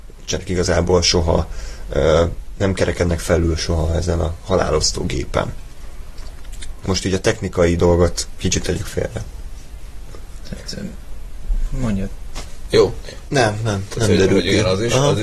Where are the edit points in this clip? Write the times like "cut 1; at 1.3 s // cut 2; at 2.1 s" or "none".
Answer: cut 1; at 6.8 s // cut 2; at 13.3 s